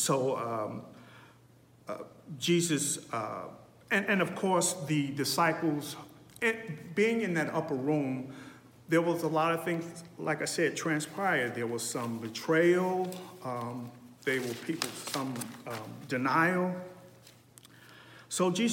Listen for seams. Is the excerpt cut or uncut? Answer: uncut